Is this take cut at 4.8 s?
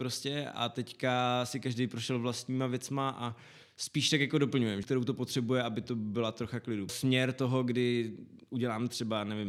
yes; 2 cuts; at 4.8 s, 6.9 s

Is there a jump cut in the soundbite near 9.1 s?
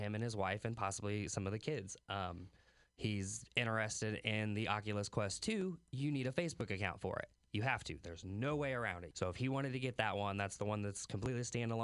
yes; 1 cut; at 9.1 s

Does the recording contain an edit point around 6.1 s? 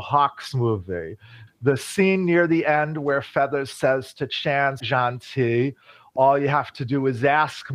no; 2 cuts; at 1.5 s, 4.8 s

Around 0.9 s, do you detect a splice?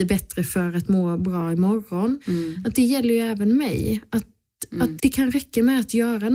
no; 2 cuts; at 2.2 s, 5.0 s

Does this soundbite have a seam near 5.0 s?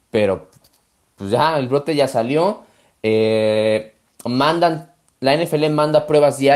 no; 0 cuts

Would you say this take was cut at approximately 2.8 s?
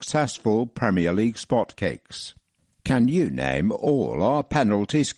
no; 0 cuts

